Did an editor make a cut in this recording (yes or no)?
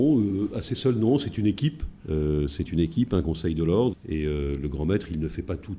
yes